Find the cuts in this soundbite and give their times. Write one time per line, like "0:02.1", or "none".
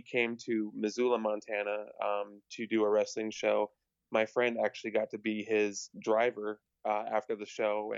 none